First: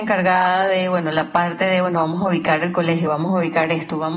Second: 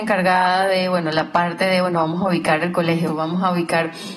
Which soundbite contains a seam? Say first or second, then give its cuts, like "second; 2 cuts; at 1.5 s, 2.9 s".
second; 1 cut; at 3.1 s